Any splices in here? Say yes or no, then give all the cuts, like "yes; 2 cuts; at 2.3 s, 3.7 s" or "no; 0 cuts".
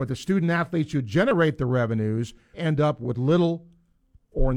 yes; 1 cut; at 2.5 s